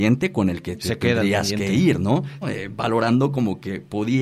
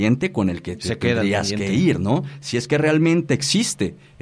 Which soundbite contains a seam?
first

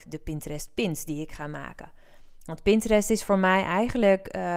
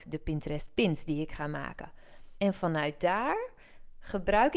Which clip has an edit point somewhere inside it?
second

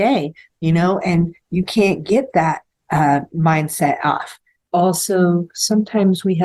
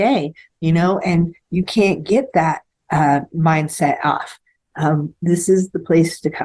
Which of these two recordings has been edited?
first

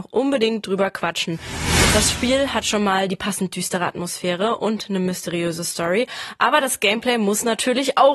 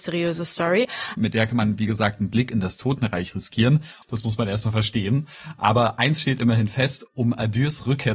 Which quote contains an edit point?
second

